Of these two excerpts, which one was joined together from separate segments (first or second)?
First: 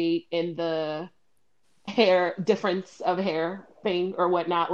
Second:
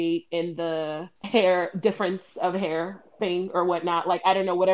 second